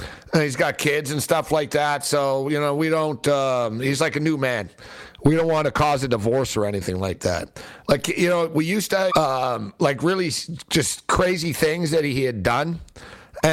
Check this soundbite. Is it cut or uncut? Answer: cut